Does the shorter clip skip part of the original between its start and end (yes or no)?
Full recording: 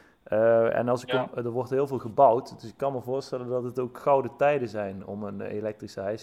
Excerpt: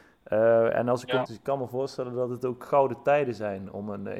yes